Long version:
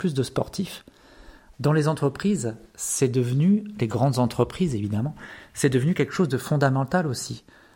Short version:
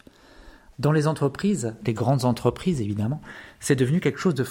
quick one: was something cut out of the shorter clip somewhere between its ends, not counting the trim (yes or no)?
yes